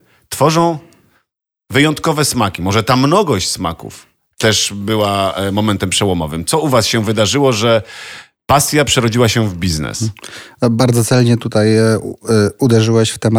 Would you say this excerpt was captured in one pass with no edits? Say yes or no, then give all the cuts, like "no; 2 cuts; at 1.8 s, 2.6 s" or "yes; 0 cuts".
yes; 0 cuts